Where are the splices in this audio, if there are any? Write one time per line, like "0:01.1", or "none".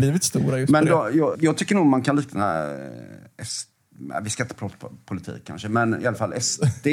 0:01.3